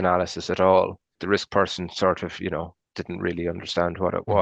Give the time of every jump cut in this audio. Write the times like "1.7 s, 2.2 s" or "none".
1.1 s